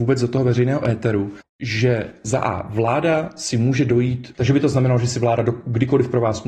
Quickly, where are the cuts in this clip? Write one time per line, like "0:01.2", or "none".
0:01.4
0:04.3